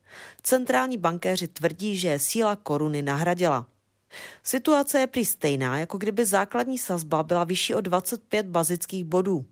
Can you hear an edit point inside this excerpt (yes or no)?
no